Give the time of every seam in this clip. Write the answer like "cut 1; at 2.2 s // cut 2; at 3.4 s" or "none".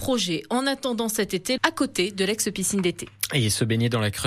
cut 1; at 1.6 s